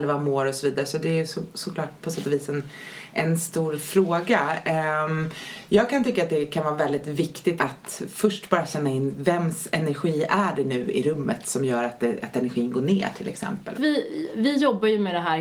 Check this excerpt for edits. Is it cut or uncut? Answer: cut